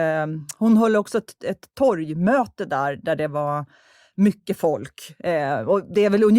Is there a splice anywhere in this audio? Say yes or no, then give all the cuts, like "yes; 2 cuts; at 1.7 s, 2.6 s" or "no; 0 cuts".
no; 0 cuts